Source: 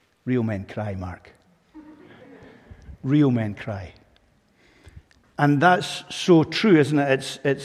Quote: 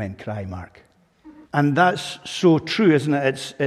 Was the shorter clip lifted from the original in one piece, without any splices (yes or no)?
no